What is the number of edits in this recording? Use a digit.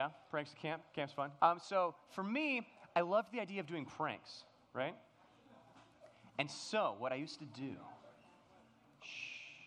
1